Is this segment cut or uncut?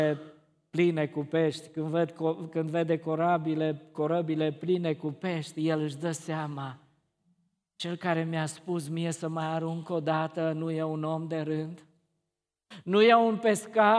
uncut